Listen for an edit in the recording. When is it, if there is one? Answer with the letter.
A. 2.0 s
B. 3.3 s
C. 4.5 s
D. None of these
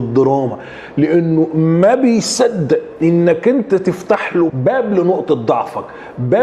C